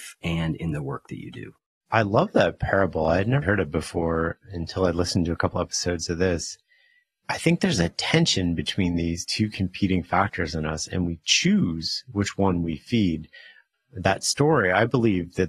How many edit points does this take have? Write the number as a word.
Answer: two